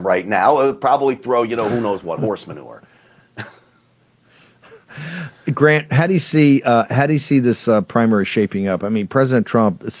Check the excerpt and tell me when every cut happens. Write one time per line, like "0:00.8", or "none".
none